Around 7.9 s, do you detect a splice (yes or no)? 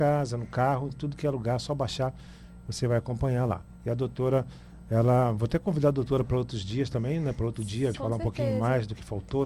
yes